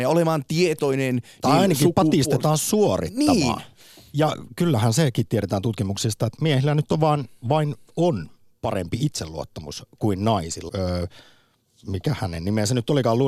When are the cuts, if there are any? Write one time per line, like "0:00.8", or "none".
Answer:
0:06.4
0:10.7